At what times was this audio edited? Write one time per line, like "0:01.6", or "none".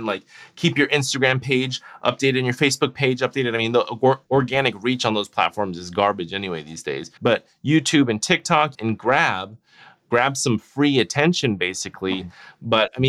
0:07.2
0:08.7